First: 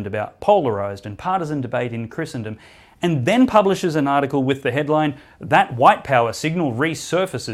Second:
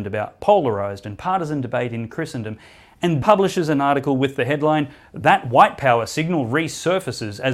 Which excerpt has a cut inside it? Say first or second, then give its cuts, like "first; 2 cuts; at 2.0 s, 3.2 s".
second; 1 cut; at 3.2 s